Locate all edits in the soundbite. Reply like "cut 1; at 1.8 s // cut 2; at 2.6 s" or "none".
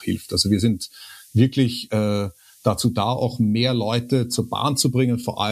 none